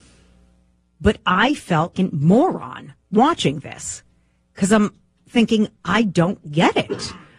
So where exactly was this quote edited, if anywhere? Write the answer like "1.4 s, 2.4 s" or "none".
1.9 s, 3.0 s